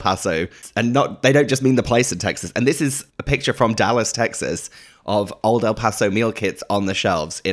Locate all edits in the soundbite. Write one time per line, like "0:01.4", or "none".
0:03.1